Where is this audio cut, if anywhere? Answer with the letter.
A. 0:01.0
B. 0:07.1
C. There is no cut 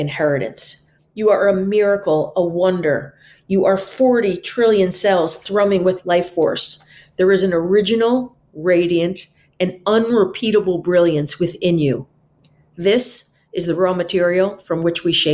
A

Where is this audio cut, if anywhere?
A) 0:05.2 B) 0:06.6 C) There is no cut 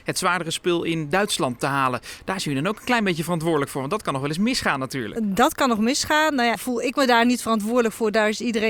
B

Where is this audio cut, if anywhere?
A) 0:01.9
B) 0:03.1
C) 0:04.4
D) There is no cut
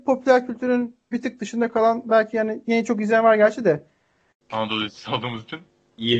C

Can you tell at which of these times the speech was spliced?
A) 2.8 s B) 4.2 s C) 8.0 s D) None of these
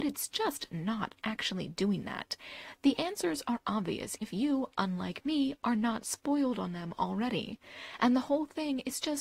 B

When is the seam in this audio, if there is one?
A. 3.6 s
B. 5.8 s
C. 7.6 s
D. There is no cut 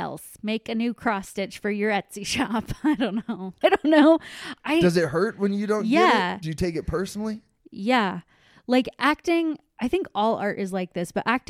A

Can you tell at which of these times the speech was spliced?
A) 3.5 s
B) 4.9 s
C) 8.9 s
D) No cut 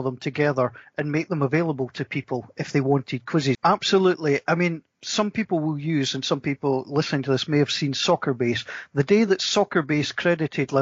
A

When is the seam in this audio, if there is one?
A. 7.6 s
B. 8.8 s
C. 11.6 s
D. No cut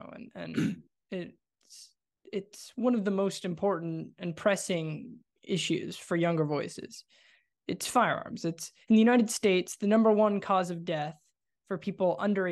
B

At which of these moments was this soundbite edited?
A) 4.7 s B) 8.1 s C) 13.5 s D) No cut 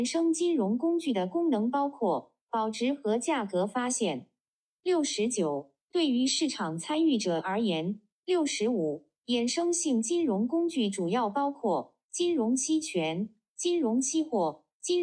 B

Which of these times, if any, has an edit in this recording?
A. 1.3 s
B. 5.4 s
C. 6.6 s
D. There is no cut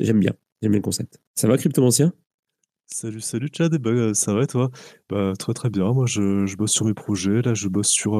A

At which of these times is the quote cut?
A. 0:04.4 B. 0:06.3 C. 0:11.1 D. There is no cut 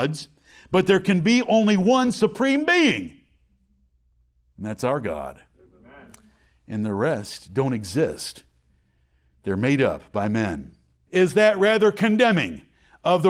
C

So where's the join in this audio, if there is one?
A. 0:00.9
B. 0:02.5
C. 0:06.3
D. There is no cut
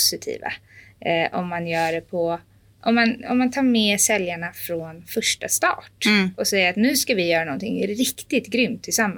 D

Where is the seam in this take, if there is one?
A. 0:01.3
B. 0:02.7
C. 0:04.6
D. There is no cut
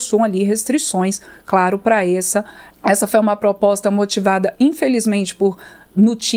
B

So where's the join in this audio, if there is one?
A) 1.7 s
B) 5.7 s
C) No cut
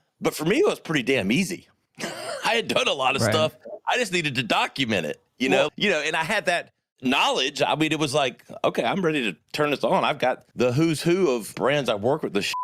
B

